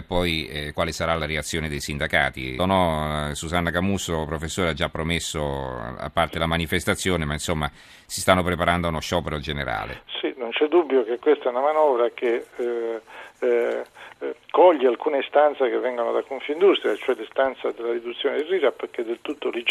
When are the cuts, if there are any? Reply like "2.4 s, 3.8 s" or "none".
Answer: 2.6 s